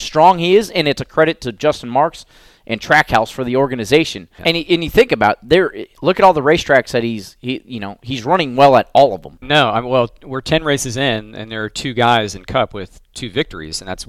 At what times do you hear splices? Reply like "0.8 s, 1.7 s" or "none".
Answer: 4.4 s, 9.4 s